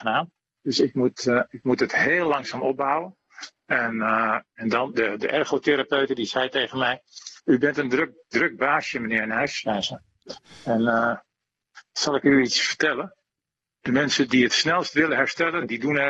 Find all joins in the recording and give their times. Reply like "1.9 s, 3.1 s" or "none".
4.9 s